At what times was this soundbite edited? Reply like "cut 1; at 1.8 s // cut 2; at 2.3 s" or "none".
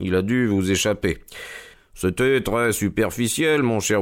cut 1; at 1.7 s